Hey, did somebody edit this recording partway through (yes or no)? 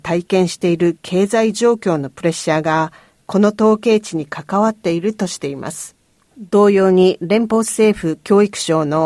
yes